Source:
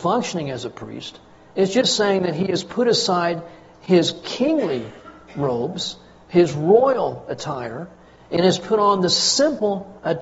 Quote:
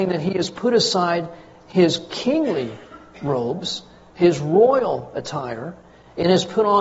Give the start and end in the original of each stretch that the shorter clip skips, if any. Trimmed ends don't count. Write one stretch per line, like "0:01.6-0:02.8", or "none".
none